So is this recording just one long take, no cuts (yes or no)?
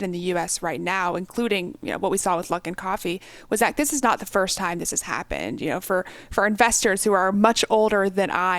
yes